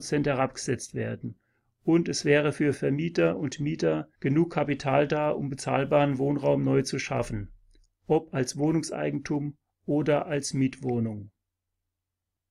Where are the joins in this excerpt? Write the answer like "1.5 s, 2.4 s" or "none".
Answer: 4.2 s